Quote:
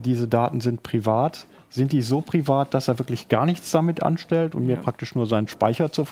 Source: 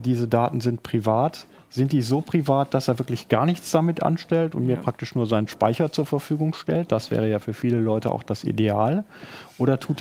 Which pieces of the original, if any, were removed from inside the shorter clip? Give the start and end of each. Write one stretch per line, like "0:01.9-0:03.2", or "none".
none